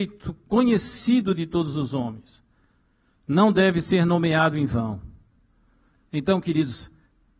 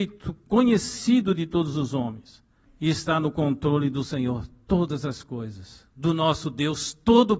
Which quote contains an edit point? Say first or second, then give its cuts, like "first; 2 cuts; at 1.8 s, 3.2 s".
second; 1 cut; at 2.7 s